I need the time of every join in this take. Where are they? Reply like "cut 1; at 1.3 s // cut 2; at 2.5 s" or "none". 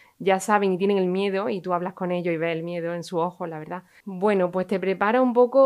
cut 1; at 4.0 s